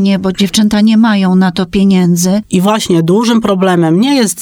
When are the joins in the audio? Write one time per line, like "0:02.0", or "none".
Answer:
0:02.4